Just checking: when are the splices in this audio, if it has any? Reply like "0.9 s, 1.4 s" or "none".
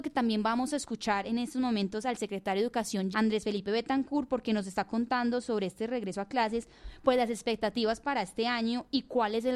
3.1 s